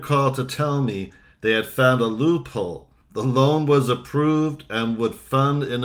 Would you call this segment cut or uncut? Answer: uncut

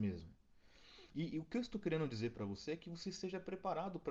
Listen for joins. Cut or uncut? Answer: uncut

